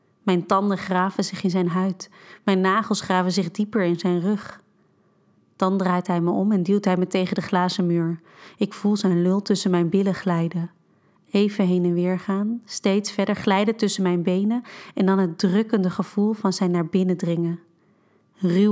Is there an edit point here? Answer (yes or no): no